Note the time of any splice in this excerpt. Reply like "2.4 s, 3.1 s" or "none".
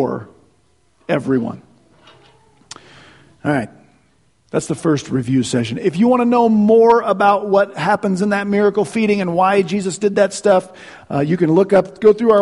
none

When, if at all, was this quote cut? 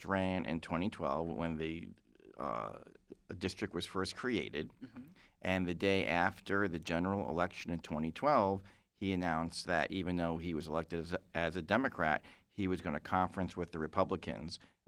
none

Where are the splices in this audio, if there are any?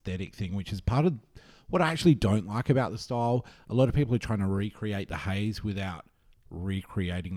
none

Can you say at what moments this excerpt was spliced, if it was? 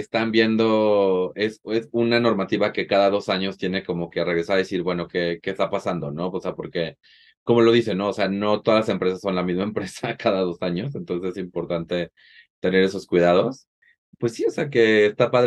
none

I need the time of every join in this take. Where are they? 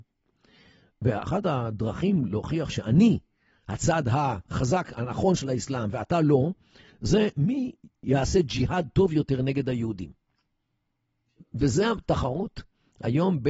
none

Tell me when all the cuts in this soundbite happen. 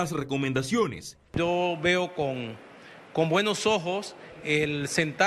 1.3 s

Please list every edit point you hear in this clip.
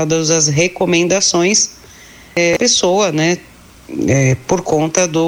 none

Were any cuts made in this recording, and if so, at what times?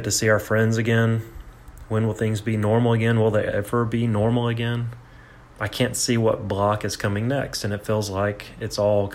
5.4 s

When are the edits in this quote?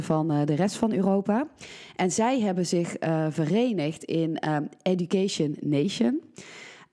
none

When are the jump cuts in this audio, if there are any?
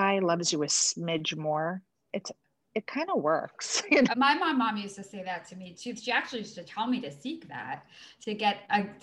4.1 s

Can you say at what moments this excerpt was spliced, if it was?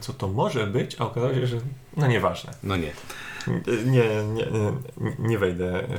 none

